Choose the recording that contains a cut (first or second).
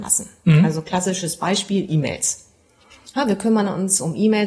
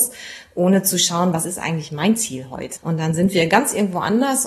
second